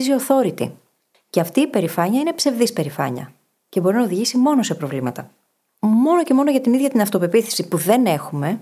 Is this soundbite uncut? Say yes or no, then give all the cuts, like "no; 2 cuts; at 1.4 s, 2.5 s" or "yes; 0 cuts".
no; 1 cut; at 1.1 s